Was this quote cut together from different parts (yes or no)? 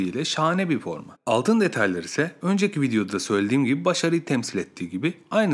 yes